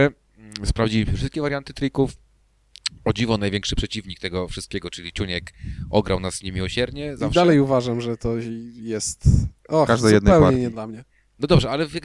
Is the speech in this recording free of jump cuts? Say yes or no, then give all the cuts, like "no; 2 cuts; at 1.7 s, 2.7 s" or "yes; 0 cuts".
yes; 0 cuts